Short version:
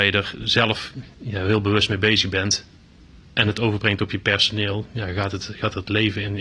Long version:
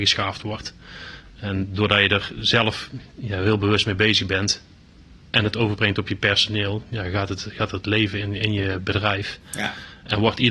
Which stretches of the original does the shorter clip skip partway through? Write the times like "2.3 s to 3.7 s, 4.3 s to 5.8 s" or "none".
none